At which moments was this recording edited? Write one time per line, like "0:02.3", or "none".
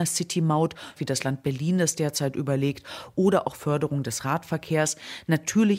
0:01.0